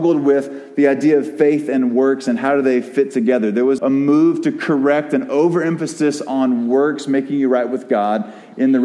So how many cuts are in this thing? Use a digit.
1